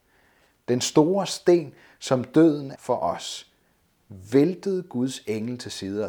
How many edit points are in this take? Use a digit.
1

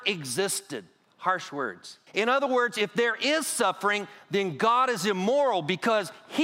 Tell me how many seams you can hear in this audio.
1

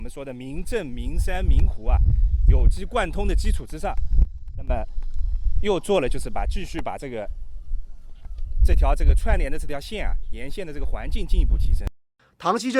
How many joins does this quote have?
0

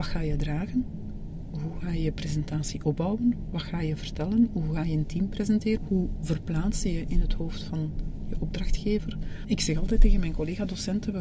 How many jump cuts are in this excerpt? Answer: 2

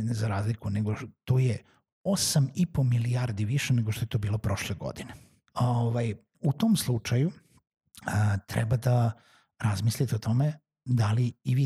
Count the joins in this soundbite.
1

